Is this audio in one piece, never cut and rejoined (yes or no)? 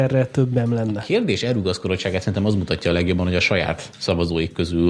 yes